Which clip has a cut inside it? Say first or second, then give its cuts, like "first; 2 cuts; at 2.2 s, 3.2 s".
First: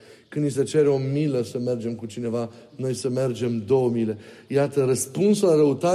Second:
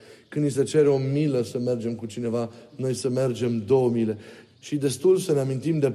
second; 1 cut; at 4.4 s